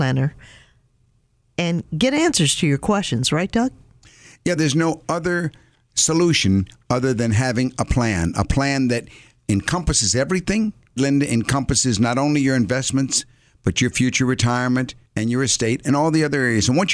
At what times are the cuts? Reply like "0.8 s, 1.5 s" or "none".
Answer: 4.6 s, 11.0 s, 15.1 s